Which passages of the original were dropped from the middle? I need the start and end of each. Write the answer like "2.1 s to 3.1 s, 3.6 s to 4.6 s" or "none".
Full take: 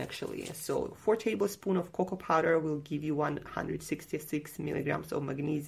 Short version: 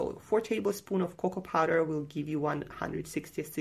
none